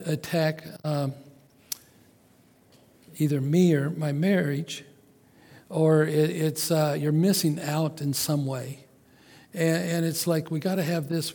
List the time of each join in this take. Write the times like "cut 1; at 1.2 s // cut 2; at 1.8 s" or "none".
cut 1; at 5.6 s